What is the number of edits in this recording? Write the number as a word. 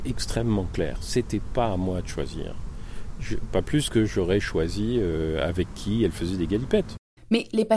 zero